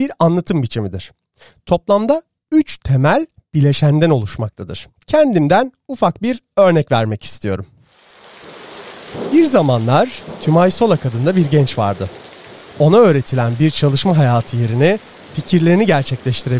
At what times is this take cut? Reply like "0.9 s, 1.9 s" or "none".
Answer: 5.0 s